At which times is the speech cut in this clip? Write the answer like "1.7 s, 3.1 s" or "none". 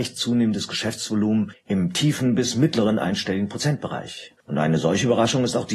4.4 s